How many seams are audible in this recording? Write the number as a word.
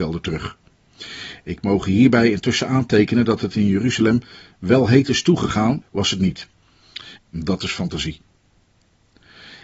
two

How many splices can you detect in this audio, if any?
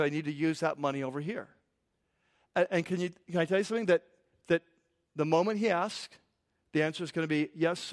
zero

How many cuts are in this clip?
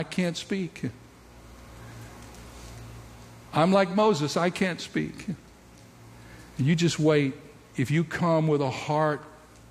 zero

